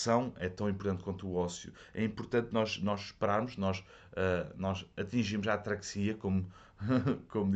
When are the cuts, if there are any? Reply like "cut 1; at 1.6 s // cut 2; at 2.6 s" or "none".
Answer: none